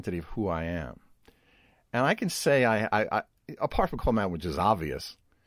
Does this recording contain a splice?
no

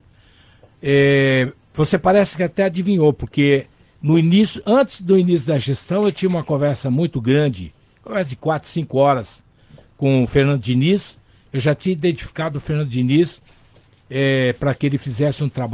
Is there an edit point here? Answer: no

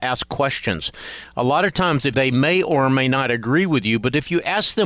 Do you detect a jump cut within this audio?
yes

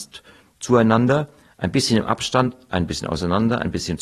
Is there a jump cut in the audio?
no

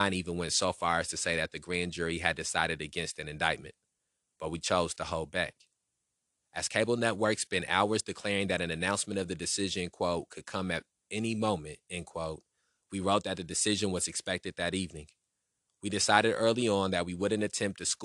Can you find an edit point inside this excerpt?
no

